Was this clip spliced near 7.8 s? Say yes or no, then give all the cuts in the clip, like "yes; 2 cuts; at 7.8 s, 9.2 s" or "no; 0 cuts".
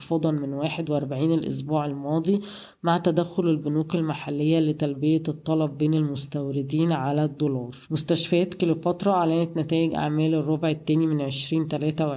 yes; 1 cut; at 7.8 s